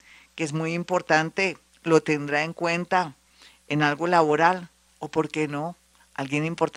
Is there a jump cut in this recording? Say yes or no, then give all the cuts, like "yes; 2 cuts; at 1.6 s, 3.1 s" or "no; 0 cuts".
no; 0 cuts